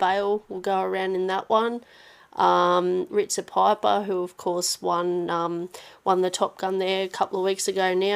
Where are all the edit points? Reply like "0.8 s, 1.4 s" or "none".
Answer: 3.1 s